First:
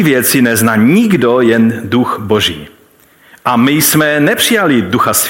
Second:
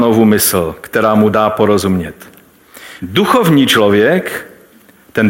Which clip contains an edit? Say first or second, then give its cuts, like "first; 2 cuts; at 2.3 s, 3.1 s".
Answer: second; 1 cut; at 3.0 s